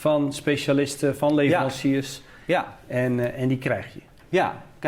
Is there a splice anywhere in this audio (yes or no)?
no